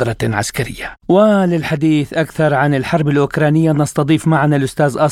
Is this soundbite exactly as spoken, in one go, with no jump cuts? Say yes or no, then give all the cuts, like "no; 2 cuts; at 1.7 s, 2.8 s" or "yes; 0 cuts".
no; 1 cut; at 1.0 s